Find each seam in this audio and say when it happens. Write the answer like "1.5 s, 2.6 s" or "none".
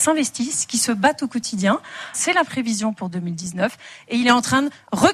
2.1 s